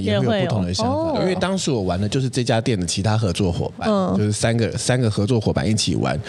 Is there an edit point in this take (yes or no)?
no